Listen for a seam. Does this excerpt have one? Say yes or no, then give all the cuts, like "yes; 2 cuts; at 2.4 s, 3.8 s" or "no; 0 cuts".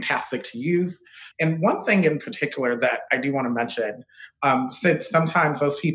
yes; 2 cuts; at 1.3 s, 3.1 s